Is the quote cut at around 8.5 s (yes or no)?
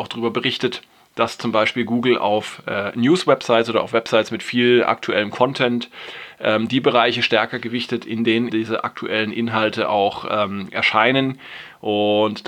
yes